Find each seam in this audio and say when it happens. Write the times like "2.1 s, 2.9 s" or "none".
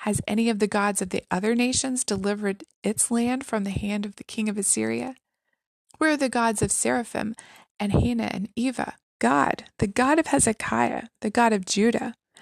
5.8 s, 9.1 s